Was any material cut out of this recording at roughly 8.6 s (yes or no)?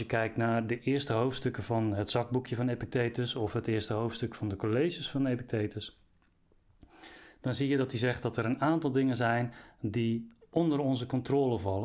no